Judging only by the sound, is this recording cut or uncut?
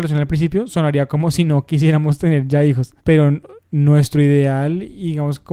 cut